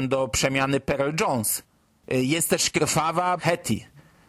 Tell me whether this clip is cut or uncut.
cut